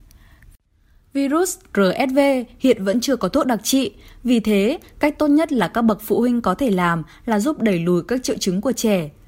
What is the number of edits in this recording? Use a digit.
0